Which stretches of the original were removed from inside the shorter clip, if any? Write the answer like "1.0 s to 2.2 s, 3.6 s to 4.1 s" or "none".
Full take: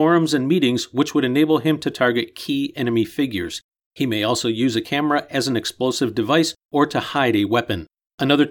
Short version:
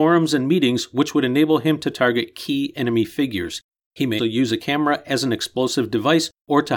4.2 s to 4.4 s